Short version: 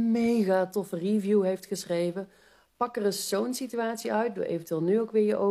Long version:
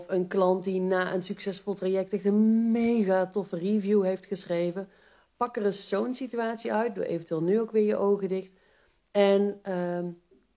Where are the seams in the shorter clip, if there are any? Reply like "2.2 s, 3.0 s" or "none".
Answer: none